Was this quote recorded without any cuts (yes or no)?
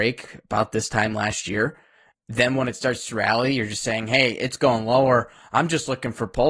no